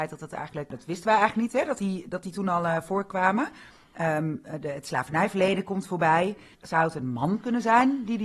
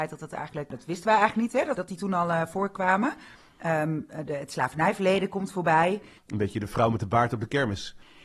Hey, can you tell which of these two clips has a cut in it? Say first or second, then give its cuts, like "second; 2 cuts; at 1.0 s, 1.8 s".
second; 2 cuts; at 1.8 s, 6.2 s